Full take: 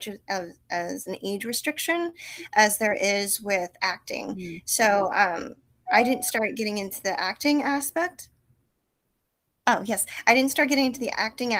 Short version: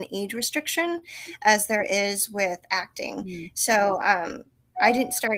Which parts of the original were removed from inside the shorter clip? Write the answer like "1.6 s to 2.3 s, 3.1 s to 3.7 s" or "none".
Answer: none